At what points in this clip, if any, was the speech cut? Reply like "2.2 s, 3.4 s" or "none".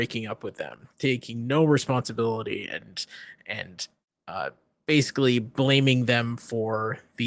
none